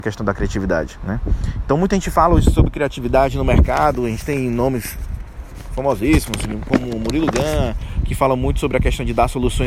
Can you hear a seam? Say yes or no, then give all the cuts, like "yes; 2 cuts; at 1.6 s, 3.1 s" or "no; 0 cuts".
no; 0 cuts